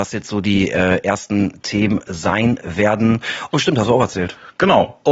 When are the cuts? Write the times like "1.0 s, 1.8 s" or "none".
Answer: 3.5 s